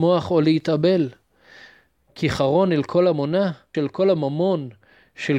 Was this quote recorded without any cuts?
no; 1 cut; at 3.7 s

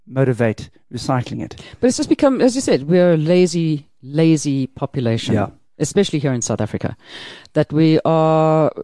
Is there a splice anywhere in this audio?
no; 0 cuts

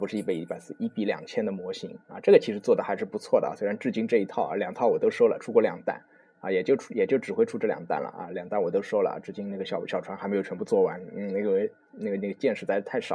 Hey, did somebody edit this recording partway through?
no; 0 cuts

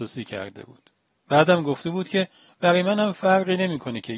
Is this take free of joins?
no; 1 cut; at 1.2 s

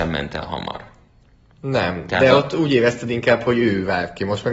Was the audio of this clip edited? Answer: no; 0 cuts

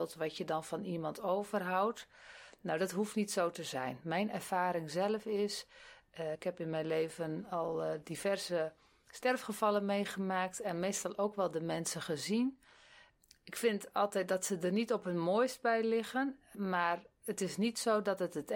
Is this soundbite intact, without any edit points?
yes; 0 cuts

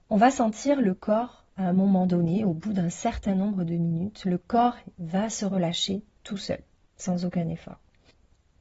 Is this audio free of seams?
yes; 0 cuts

